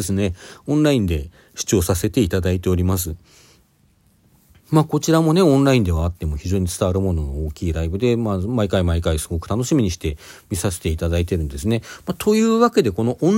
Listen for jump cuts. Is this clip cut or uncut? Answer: uncut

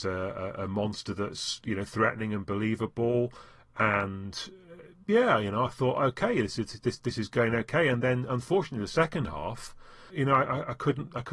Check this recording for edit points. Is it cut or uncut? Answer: uncut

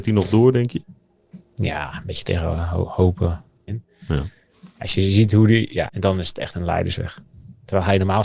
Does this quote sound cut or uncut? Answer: cut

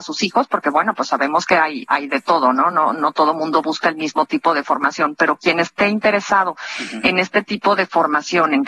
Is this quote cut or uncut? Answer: uncut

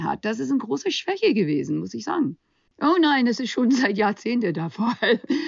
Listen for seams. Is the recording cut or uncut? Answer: cut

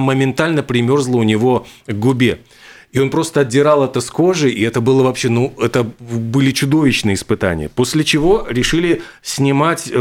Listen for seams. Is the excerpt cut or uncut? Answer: uncut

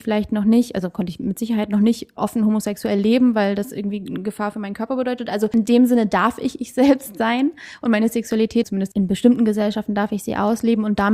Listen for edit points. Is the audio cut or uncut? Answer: cut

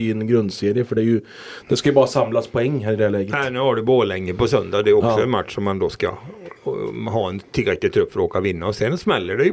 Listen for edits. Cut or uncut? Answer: uncut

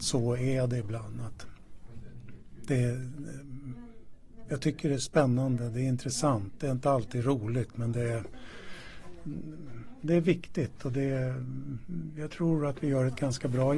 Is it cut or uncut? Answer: uncut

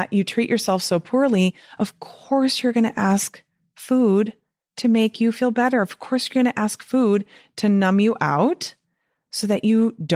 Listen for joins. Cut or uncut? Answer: uncut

